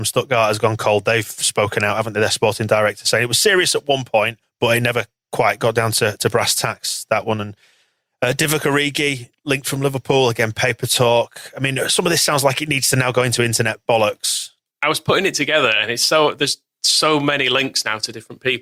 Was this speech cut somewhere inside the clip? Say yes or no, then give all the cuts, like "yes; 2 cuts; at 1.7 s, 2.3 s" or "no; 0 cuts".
no; 0 cuts